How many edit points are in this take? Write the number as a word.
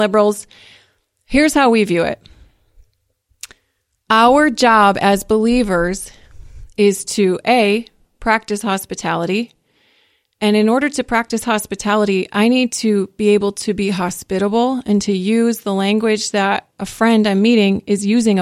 zero